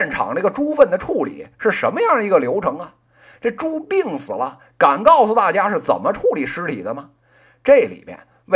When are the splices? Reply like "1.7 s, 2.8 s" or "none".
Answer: none